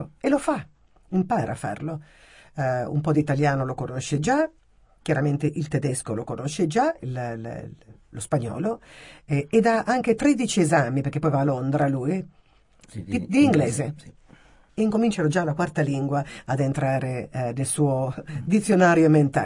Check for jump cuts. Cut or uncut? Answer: cut